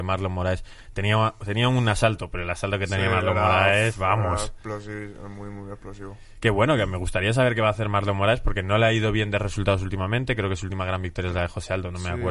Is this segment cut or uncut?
uncut